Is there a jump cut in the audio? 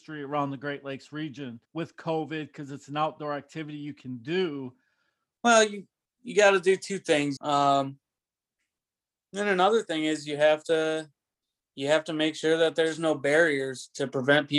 yes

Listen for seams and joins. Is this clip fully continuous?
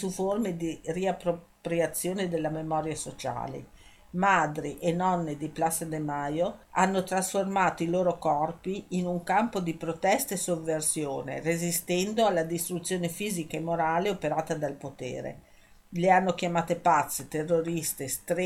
no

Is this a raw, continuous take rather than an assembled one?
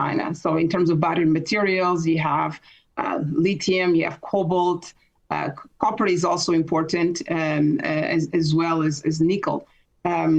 yes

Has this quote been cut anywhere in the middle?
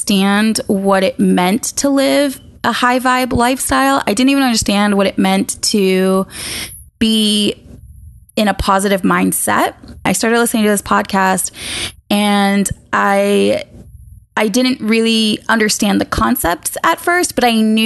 yes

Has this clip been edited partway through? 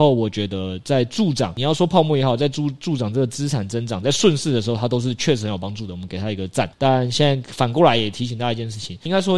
no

